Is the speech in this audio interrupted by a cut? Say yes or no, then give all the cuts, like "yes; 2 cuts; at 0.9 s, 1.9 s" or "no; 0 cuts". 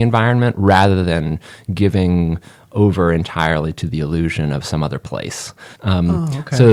yes; 1 cut; at 5.8 s